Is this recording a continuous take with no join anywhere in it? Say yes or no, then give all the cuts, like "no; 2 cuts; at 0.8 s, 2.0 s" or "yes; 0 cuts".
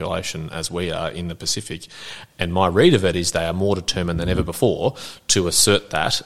no; 1 cut; at 2.3 s